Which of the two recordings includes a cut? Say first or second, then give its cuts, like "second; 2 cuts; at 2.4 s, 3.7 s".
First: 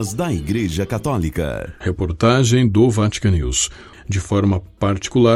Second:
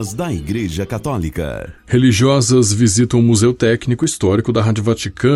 first; 2 cuts; at 1.8 s, 3.9 s